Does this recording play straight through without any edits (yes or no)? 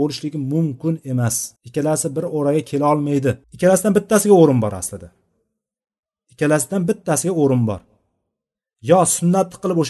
no